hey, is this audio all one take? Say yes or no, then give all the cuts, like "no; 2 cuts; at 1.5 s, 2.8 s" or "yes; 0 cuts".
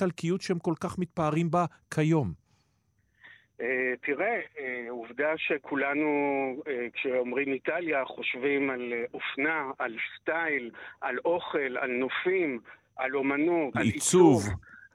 no; 1 cut; at 13.7 s